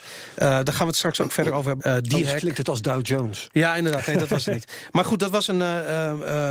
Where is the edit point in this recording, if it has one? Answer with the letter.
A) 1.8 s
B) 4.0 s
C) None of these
A